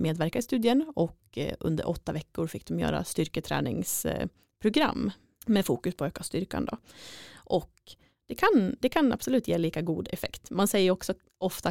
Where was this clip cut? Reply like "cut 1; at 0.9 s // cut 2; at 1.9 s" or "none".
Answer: none